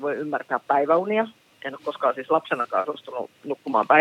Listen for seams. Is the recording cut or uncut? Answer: uncut